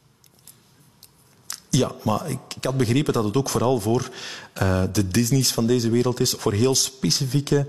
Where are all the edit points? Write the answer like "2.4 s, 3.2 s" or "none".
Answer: 6.4 s

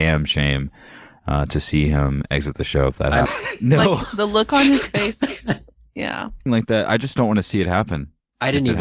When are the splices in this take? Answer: 3.3 s, 6.5 s

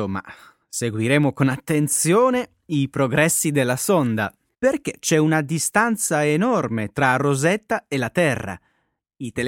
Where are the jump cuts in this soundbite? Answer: 4.5 s

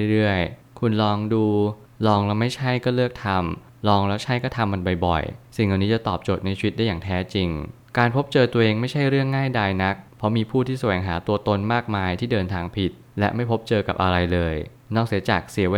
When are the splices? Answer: none

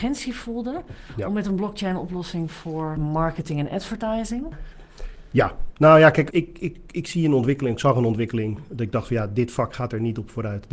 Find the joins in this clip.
6.3 s

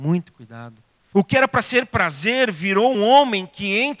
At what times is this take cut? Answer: 1.1 s, 2.9 s

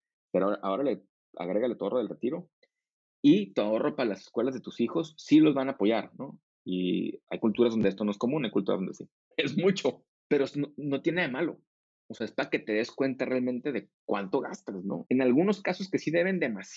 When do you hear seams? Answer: 9.3 s, 15.1 s

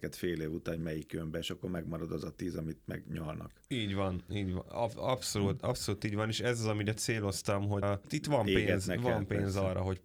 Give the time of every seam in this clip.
7.8 s

